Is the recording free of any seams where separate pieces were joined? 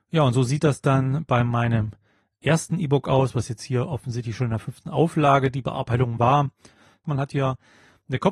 no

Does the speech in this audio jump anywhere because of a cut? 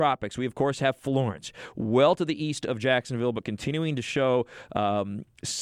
no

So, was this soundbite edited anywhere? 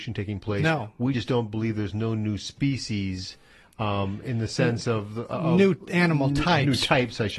no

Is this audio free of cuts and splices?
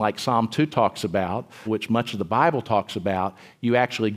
no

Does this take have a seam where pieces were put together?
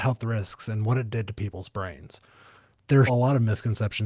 yes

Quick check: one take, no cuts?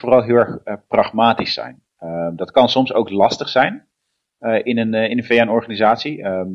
yes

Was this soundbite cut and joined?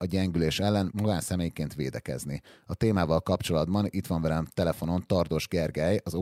no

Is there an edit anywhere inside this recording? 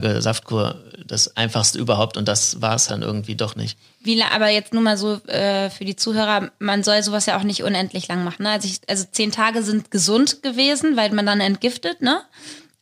yes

